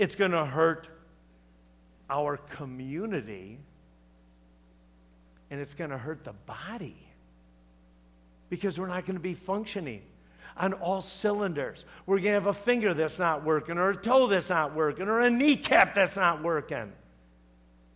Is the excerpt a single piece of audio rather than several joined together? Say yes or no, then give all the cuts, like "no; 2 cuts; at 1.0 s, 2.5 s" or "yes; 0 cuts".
yes; 0 cuts